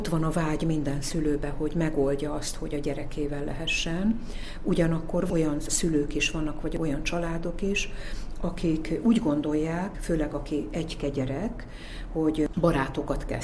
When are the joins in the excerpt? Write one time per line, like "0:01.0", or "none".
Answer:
0:09.9